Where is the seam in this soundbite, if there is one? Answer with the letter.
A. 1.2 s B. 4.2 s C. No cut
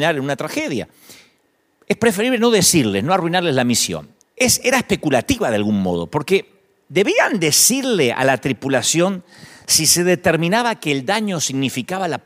B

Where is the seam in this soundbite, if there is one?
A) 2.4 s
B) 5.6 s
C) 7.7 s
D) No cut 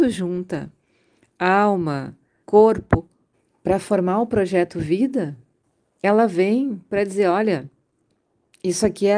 A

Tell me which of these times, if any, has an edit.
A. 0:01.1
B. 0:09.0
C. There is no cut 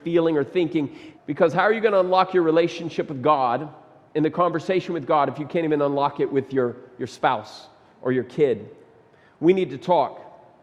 A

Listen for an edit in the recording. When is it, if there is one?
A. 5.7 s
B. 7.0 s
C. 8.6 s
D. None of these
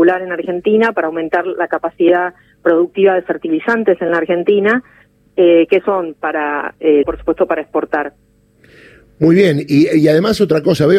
B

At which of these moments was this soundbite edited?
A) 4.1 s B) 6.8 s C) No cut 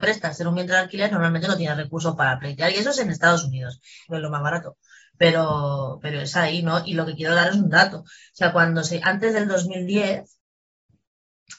A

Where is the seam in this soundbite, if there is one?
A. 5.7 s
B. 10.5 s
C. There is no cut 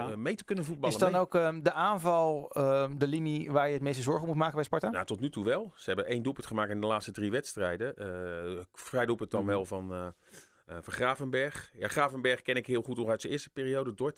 C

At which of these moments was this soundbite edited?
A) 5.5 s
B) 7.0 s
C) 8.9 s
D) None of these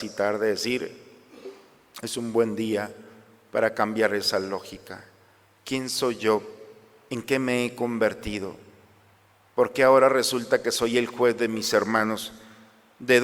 D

